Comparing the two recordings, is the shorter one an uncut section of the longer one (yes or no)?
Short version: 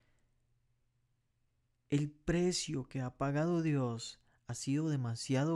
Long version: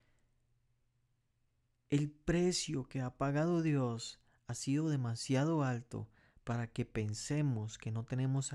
yes